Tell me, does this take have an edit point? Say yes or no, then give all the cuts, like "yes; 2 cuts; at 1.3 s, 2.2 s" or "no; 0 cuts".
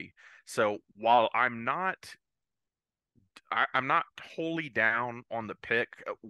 no; 0 cuts